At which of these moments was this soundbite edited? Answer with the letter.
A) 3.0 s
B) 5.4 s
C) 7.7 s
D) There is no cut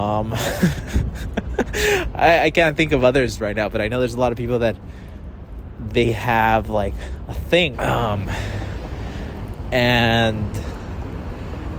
C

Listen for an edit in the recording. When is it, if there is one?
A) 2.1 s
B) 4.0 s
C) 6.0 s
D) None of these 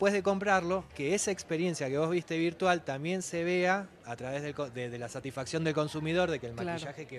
B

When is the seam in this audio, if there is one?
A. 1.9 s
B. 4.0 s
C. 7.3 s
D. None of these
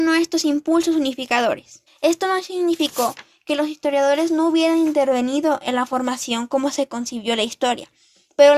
A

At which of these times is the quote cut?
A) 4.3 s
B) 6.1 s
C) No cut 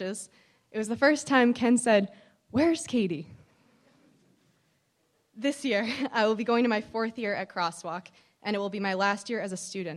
C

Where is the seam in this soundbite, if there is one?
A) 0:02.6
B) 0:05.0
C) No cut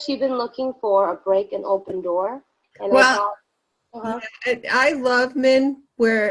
A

